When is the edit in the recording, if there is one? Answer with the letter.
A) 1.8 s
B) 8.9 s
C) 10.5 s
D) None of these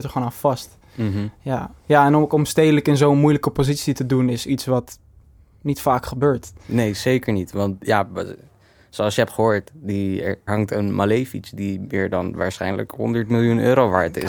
C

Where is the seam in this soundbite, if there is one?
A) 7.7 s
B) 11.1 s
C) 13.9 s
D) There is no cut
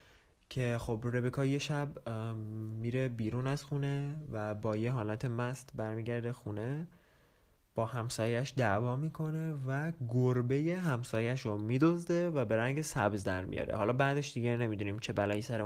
D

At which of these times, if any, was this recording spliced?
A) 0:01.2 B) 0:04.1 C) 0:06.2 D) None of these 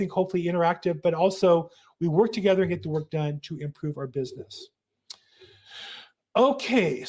D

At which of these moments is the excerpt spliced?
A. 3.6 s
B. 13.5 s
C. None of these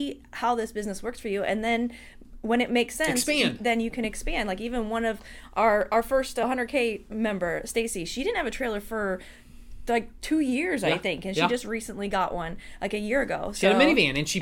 C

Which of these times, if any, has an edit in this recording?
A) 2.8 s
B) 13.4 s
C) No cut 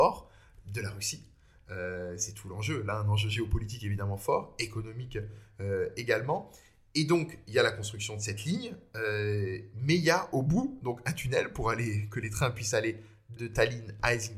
B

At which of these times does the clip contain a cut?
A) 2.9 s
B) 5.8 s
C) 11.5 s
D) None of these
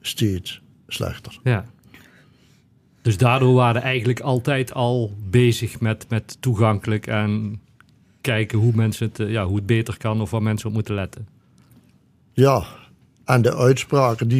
D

